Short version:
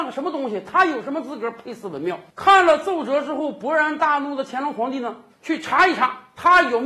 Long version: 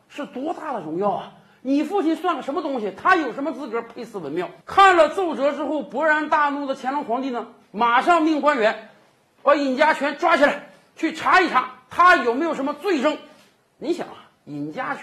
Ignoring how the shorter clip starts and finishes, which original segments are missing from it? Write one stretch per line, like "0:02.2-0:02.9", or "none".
0:07.6-0:10.8